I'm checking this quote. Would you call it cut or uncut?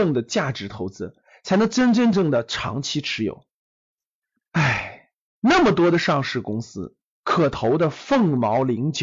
cut